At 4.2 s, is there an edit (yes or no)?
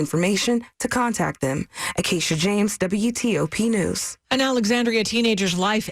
yes